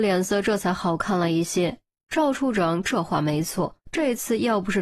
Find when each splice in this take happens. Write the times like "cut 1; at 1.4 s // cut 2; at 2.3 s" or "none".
cut 1; at 3.8 s